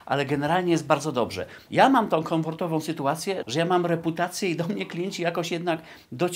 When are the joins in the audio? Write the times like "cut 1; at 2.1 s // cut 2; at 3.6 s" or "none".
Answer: cut 1; at 1.7 s // cut 2; at 3.4 s